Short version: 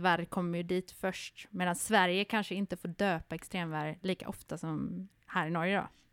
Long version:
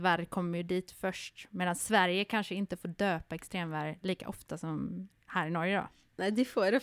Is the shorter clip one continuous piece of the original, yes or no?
yes